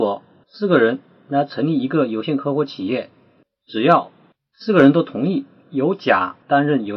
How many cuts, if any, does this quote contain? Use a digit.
0